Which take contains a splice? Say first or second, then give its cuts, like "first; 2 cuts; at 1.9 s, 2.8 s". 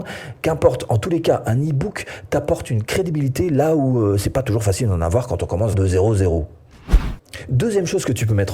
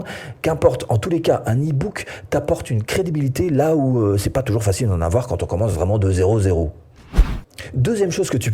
first; 1 cut; at 5.7 s